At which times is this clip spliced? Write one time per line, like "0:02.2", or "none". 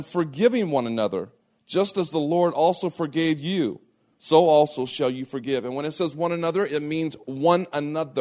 none